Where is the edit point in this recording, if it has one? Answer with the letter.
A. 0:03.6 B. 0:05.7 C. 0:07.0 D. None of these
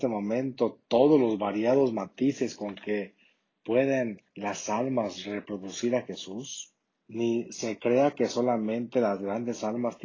C